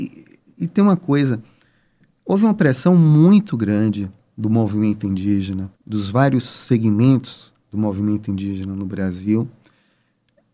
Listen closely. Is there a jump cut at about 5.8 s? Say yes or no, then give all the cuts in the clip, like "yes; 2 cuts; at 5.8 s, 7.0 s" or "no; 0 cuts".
yes; 1 cut; at 5.8 s